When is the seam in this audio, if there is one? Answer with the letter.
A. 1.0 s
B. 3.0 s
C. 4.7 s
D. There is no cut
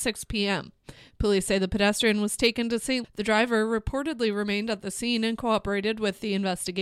B